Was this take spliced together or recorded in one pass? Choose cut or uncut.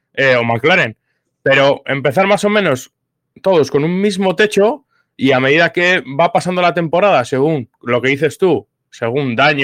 uncut